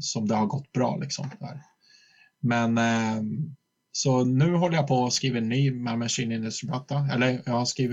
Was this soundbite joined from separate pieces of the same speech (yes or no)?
no